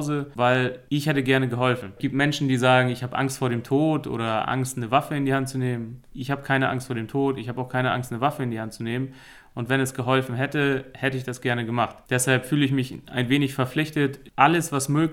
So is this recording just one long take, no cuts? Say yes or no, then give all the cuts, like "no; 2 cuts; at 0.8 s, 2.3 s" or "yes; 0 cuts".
yes; 0 cuts